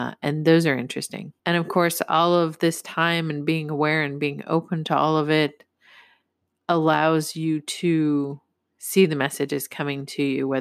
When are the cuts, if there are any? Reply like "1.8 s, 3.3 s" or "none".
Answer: 1.4 s